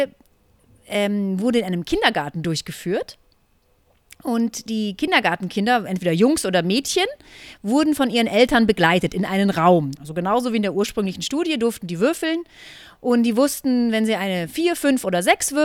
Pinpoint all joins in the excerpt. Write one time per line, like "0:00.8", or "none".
0:09.9